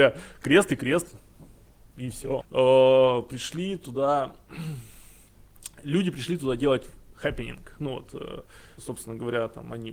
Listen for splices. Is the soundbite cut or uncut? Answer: cut